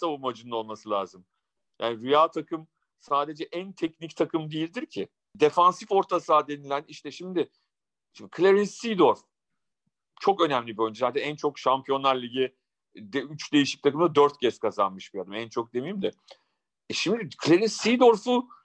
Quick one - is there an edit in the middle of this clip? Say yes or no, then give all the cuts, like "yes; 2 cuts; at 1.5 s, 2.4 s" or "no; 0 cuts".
no; 0 cuts